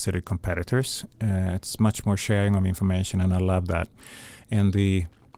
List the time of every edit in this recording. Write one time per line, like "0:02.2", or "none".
none